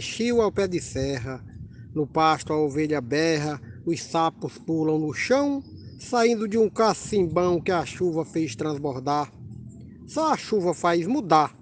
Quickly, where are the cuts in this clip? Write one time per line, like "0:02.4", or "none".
none

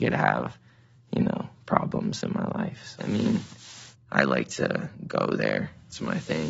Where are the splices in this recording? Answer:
0:03.0

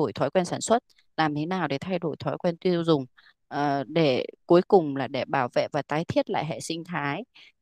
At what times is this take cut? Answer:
none

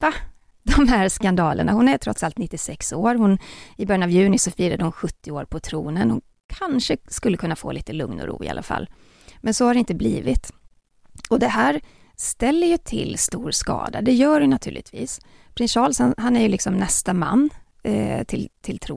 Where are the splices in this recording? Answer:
none

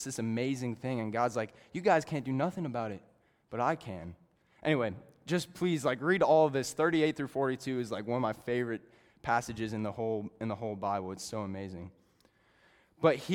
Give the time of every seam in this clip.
none

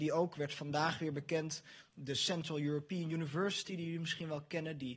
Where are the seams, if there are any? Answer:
none

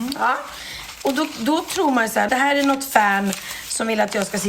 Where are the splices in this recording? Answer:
0:02.3

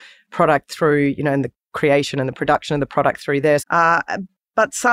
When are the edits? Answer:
0:03.6

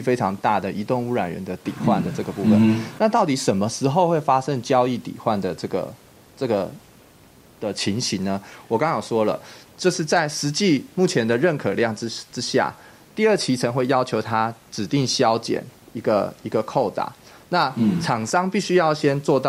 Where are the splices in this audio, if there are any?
none

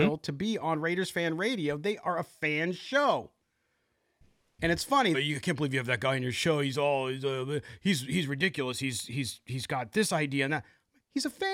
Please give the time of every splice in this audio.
0:05.1

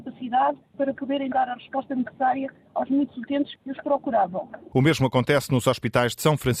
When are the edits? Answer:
0:04.7

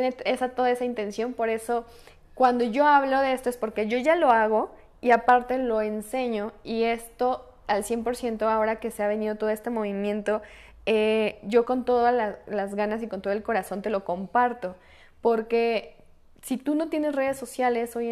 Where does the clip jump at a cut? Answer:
none

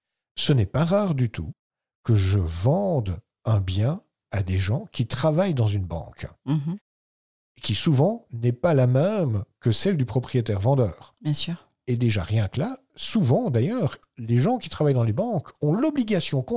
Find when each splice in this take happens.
none

